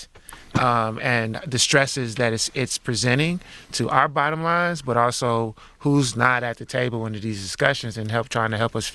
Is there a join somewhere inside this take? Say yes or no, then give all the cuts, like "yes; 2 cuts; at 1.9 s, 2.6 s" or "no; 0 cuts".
no; 0 cuts